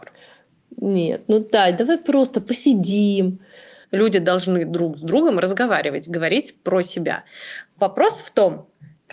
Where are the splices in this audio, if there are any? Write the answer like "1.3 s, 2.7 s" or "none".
3.8 s

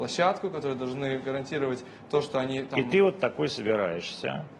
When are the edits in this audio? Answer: none

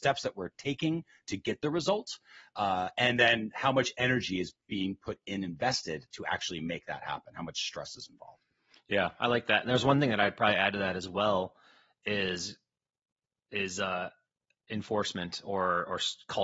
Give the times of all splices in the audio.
none

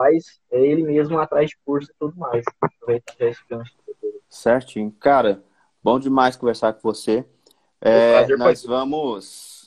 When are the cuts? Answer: 4.2 s

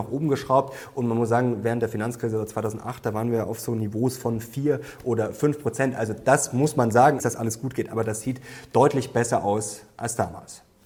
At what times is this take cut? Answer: 7.2 s

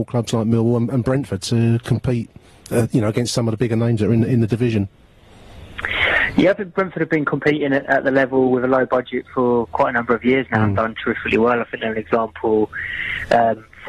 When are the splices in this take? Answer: 1.4 s

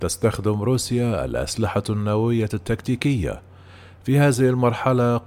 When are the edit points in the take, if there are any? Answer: none

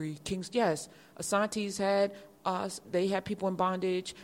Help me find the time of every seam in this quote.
2.8 s

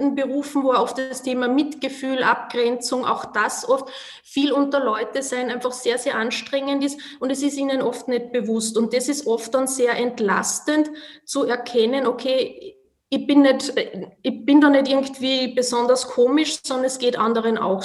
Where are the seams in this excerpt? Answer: none

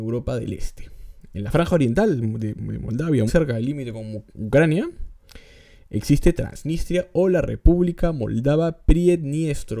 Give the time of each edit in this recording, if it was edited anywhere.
3.3 s

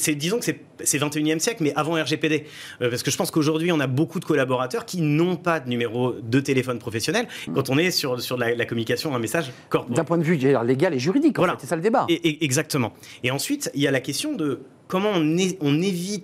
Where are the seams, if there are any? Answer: 7.5 s

